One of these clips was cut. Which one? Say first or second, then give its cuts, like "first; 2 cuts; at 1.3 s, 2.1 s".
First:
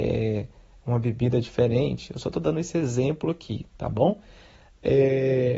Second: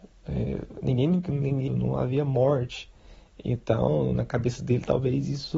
second; 1 cut; at 1.7 s